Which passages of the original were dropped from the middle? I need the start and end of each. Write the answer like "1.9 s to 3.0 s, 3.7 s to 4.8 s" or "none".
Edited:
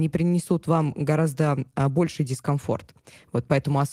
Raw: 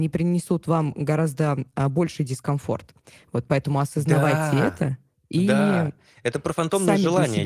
none